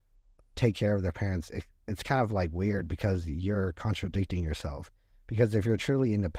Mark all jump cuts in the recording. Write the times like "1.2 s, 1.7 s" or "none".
none

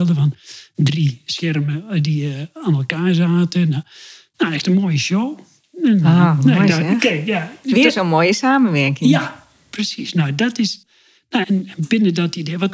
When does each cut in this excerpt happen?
11.4 s

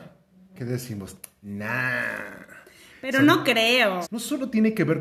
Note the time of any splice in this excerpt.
4.0 s

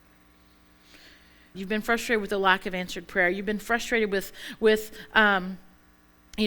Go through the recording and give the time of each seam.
1.5 s

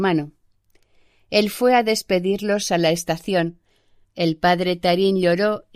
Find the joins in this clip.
4.0 s

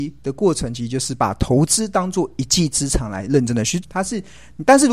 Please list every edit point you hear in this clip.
3.8 s

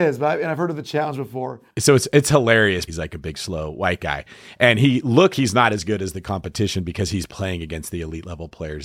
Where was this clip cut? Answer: 2.9 s, 5.3 s

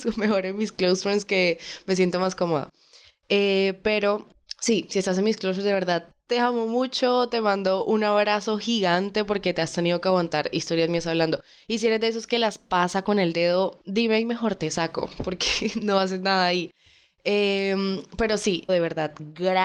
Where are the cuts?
18.7 s

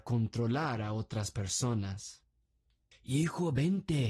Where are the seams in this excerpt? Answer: 2.9 s

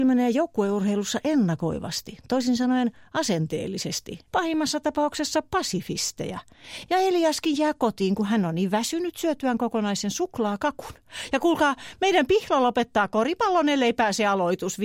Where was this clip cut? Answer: 4.3 s, 6.9 s

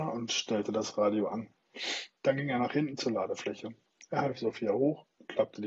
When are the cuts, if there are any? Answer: none

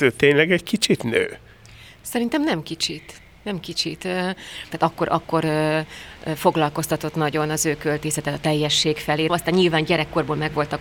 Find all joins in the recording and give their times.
4.7 s, 9.3 s

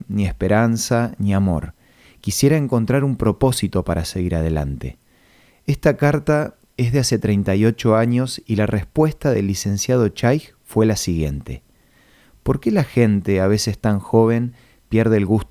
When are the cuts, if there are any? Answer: none

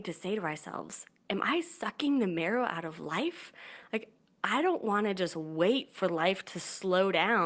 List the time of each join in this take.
none

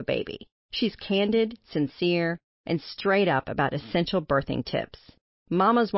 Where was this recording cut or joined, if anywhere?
none

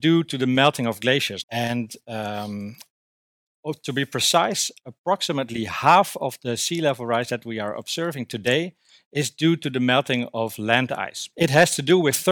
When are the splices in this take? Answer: 1.4 s, 11.3 s

